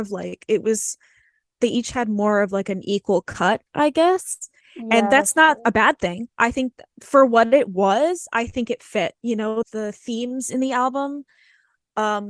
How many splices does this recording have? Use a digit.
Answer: 2